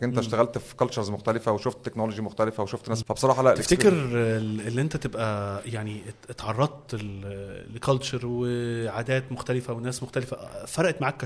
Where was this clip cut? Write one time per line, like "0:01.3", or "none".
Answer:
0:03.0